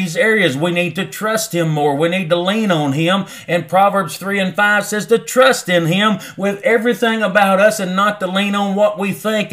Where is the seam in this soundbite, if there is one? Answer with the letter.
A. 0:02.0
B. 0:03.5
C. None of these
C